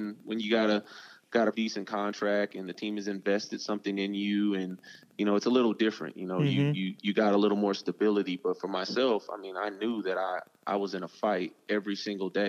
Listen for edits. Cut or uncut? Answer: cut